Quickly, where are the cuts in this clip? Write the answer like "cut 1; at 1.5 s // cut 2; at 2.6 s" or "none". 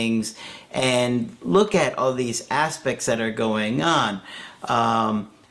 none